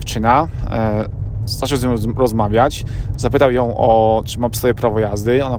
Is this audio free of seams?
yes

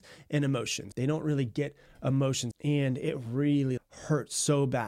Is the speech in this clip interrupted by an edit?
yes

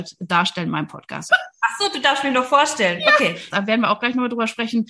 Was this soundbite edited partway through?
yes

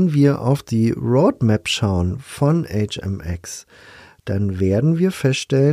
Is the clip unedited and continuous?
yes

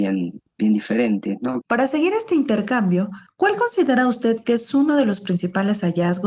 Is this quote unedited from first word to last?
no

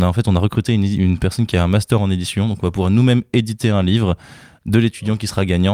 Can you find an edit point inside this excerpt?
no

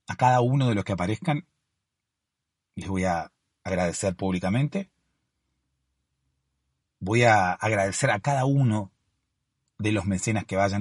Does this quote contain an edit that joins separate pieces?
yes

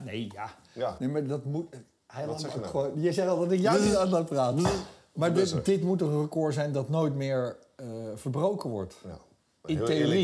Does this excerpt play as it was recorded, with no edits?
yes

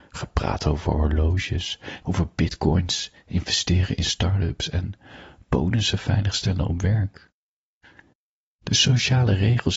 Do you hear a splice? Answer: yes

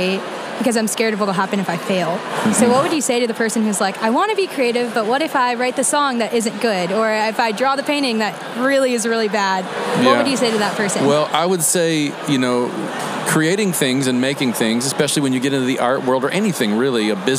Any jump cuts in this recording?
no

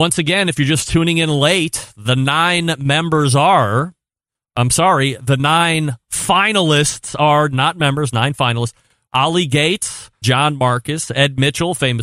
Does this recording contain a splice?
yes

